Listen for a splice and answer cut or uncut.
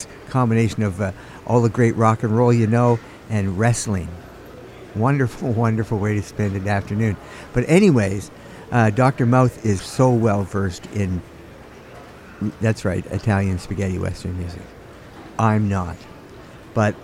cut